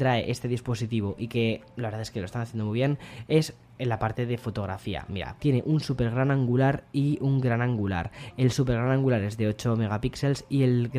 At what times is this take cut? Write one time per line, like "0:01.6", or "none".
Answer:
0:05.4

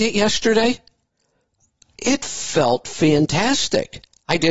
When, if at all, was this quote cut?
none

